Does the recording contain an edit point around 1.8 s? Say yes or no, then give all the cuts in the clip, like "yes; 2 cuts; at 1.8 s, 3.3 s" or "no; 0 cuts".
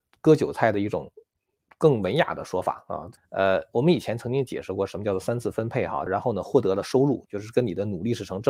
no; 3 cuts; at 3.2 s, 6.1 s, 7.3 s